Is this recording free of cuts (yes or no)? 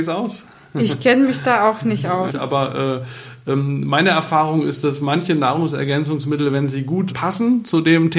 no